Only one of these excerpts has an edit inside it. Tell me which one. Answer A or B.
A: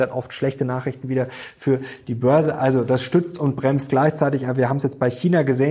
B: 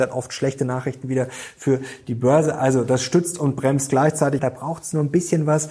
B